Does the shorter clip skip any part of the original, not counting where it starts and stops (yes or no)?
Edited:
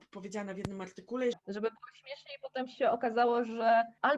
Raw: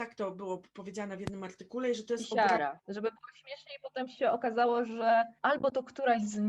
yes